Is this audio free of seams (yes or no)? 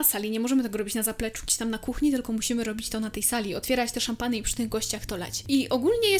yes